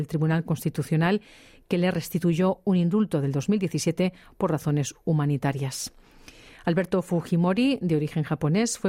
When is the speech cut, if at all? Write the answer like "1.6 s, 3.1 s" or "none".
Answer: none

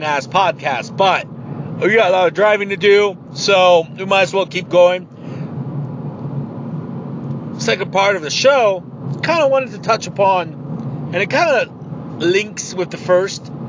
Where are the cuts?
none

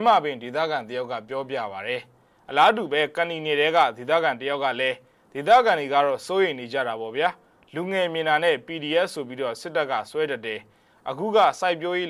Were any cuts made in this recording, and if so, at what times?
none

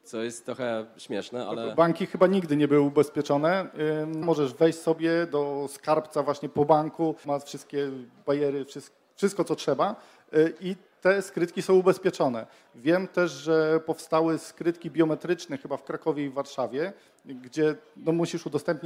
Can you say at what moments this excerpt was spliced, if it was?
4.2 s, 7.2 s

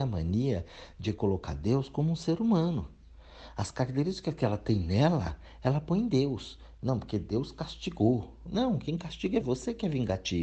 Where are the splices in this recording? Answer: 9.4 s

